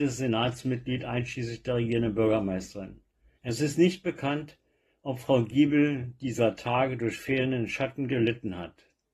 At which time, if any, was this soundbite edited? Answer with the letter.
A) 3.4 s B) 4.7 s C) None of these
A